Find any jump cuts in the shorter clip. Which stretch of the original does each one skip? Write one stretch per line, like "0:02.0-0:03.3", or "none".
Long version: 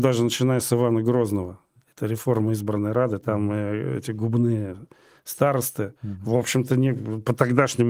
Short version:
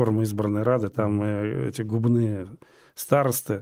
none